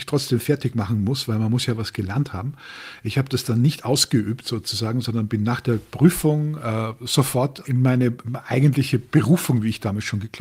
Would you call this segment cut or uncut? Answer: cut